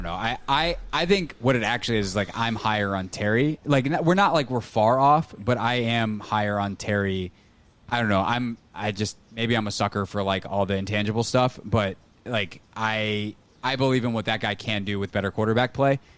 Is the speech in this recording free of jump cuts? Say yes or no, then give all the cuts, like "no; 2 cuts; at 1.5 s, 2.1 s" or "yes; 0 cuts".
yes; 0 cuts